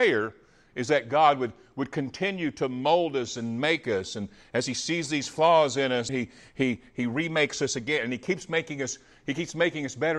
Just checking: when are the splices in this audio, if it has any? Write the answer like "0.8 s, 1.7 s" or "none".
6.1 s